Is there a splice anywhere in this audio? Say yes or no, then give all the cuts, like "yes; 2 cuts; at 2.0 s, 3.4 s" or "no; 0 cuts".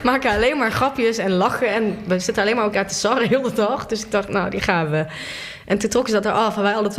no; 0 cuts